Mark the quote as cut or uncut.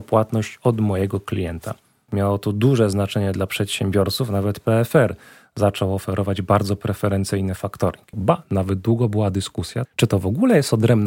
cut